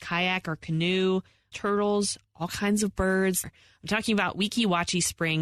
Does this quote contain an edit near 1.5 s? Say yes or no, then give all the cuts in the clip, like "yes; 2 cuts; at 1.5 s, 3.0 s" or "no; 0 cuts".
yes; 2 cuts; at 1.5 s, 3.4 s